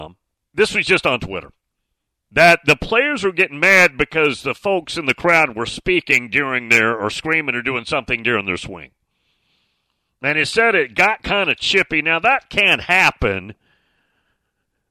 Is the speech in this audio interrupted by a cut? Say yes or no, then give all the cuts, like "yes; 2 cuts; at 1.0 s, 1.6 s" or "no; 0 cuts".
no; 0 cuts